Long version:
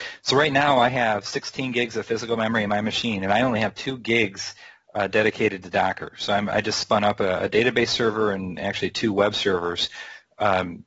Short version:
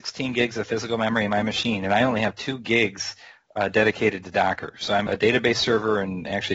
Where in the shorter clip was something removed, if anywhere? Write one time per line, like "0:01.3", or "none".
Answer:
0:05.1